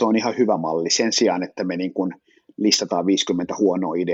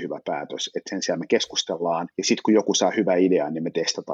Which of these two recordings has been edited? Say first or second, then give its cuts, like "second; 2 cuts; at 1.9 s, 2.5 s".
second; 1 cut; at 2.1 s